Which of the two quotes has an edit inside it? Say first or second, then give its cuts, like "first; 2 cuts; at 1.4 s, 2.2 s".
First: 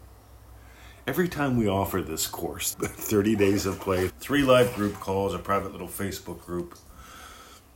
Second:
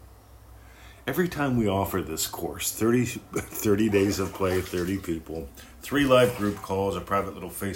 first; 2 cuts; at 2.7 s, 4.1 s